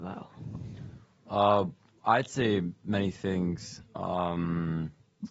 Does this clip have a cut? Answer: no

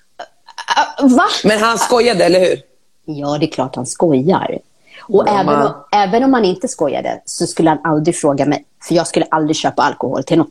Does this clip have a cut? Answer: no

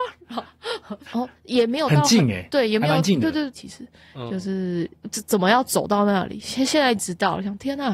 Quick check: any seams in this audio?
yes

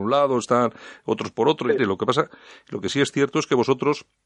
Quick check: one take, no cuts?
no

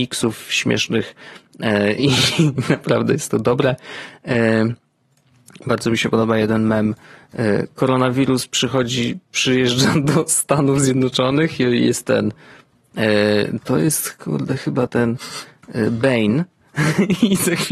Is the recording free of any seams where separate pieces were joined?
yes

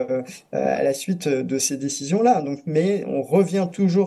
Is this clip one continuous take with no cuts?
yes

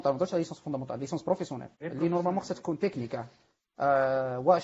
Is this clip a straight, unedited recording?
no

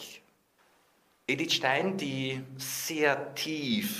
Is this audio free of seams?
yes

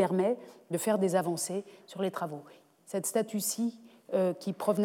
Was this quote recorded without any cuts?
yes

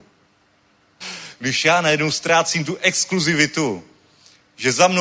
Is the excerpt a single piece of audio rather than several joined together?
no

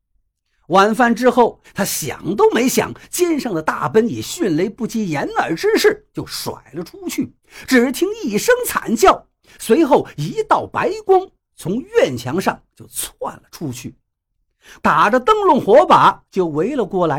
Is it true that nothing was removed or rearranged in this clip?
no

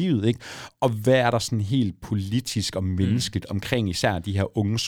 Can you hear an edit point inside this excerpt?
no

